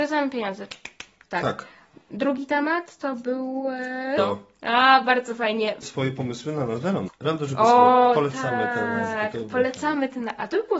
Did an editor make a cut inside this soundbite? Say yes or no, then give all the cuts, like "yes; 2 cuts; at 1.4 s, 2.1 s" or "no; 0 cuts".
yes; 3 cuts; at 4.2 s, 5.8 s, 7.1 s